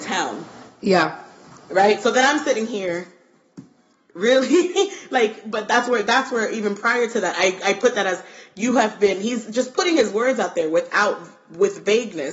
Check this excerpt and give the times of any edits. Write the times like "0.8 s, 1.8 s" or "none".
none